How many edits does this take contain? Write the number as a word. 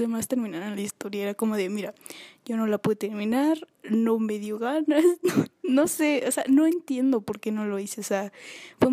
zero